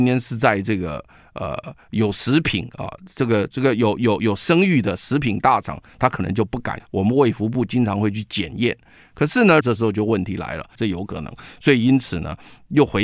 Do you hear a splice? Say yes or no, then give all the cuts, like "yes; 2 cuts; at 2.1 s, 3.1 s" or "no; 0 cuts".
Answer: yes; 3 cuts; at 6.8 s, 9.6 s, 10.8 s